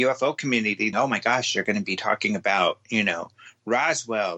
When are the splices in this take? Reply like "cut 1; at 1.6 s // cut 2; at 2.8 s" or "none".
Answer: cut 1; at 0.9 s